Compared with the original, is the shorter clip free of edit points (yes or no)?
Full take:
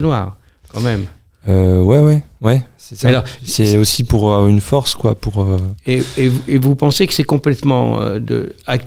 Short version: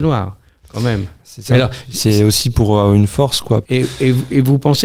no